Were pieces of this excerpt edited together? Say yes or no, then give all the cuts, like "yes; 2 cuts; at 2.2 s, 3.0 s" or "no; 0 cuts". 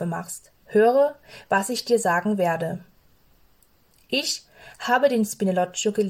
no; 0 cuts